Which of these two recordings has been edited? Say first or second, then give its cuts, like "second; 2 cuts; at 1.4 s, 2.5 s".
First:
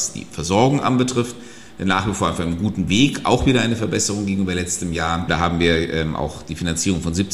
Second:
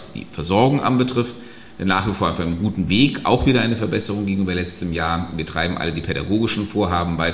first; 1 cut; at 5.3 s